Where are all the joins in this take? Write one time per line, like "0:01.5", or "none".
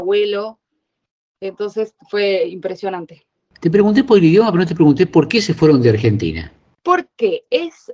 none